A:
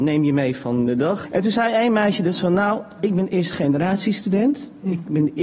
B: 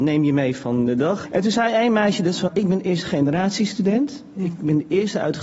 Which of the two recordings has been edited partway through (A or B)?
B